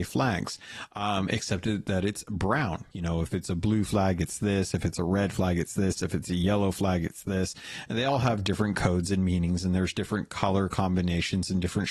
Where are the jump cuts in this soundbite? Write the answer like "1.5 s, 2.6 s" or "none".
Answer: 2.9 s